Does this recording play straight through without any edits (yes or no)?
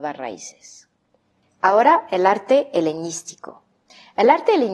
yes